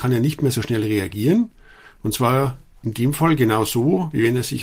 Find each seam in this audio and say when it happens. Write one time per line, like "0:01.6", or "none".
none